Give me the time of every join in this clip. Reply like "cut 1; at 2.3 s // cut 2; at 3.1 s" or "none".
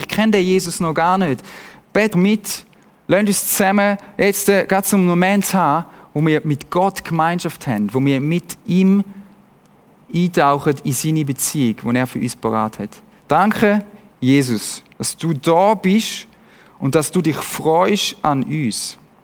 cut 1; at 2.1 s // cut 2; at 14.9 s